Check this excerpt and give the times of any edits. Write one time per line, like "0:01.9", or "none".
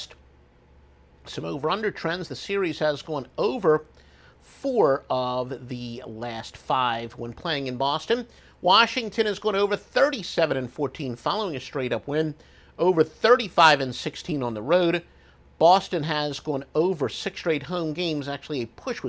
none

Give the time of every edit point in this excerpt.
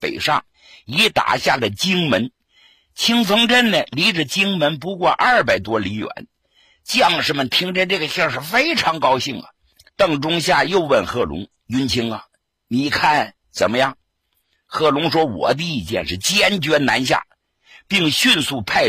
0:09.9

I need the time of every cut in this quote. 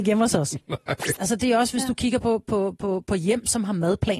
0:01.2

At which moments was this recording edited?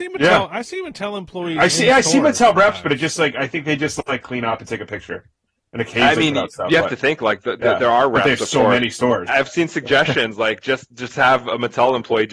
0:09.3

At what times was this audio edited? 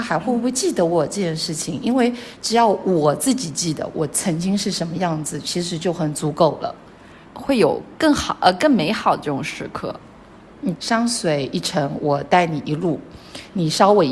0:07.2
0:10.7

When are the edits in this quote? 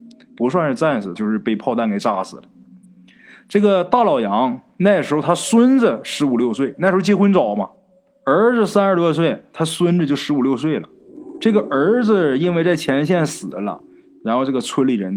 0:01.2

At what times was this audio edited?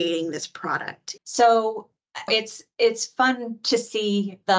0:01.2
0:02.3

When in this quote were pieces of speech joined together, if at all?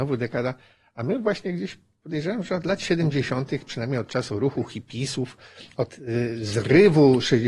none

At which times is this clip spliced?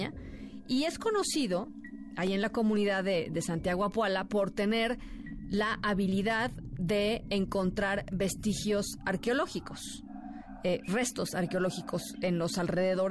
none

